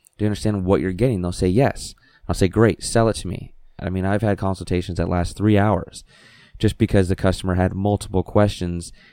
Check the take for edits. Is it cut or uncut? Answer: cut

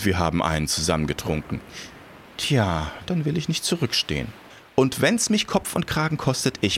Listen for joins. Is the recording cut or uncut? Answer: cut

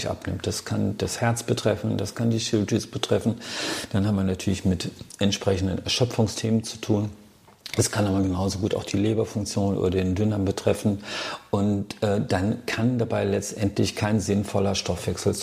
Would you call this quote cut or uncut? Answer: uncut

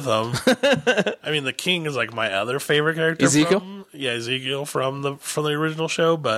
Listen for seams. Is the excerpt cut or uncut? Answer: uncut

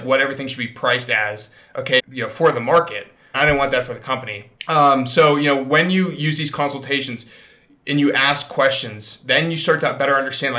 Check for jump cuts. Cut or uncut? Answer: cut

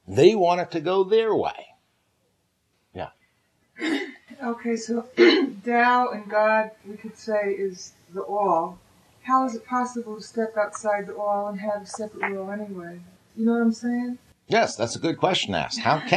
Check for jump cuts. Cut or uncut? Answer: uncut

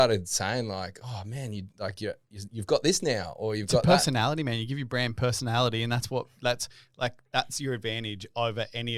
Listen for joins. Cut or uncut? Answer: uncut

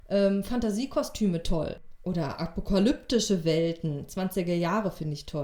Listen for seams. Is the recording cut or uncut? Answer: uncut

